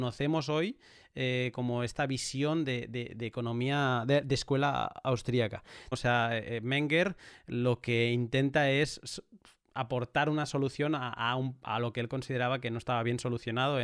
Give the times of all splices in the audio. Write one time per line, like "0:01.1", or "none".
0:05.9